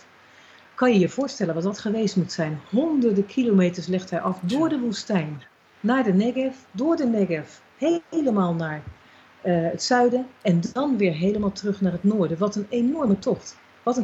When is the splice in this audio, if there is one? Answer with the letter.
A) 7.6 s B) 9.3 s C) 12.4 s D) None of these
D